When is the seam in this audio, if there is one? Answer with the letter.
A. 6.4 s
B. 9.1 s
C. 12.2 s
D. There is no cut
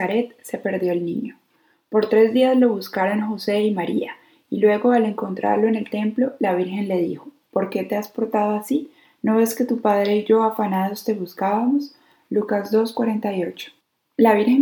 D